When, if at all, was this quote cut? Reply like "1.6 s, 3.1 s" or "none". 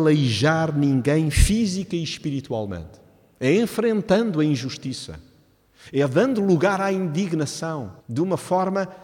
8.0 s